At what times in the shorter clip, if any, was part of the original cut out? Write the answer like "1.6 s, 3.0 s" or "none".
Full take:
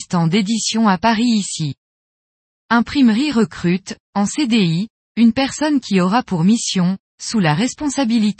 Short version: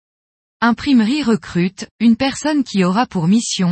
1.9 s